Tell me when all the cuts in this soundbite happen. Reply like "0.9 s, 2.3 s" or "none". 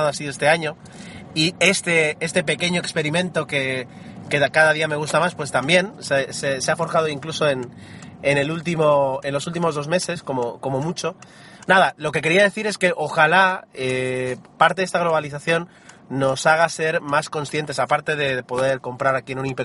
11.6 s

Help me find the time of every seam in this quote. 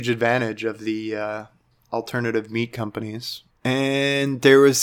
3.5 s

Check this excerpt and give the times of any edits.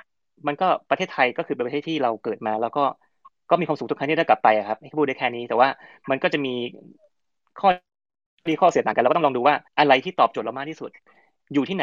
9.7 s

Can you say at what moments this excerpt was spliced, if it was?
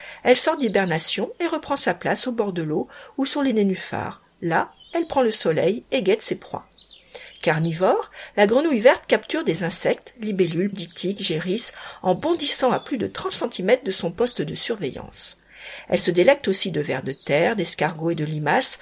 10.7 s

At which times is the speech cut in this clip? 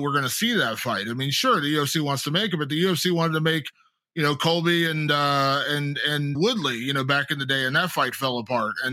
6.3 s

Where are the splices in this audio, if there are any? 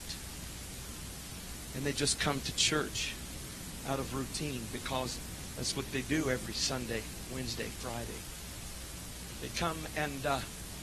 9.5 s

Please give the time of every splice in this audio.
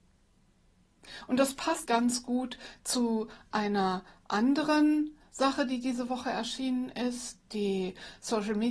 1.9 s

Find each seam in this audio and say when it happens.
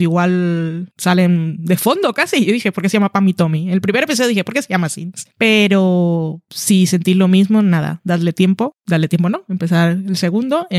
none

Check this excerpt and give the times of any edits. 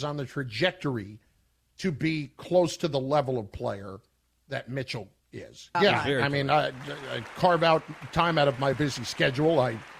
5.7 s, 8.7 s

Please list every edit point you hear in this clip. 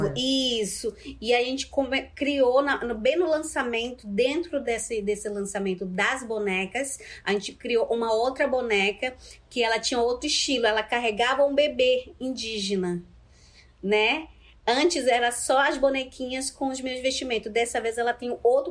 none

